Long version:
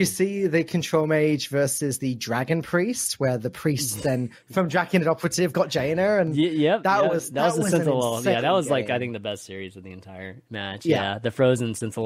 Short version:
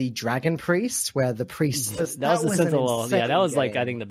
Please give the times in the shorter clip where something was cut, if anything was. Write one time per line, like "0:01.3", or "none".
0:02.0

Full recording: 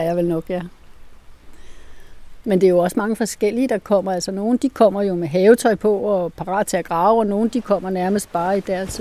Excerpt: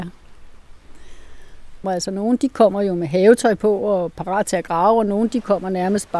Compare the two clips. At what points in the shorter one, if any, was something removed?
0:01.8

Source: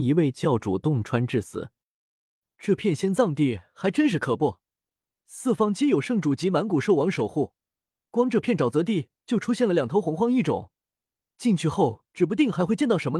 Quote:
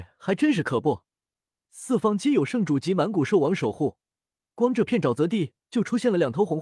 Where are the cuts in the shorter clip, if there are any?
none

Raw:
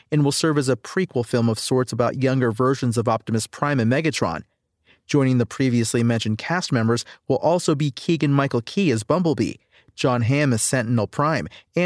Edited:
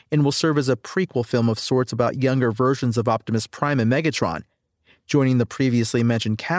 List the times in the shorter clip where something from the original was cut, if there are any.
none

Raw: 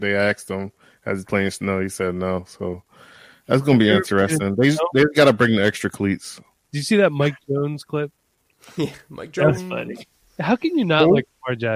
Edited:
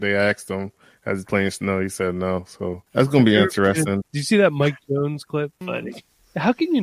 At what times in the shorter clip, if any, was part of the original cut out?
0:02.9
0:04.0
0:05.6

